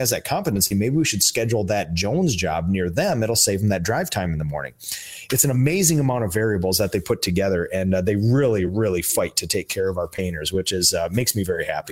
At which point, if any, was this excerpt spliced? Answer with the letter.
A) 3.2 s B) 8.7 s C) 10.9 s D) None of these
D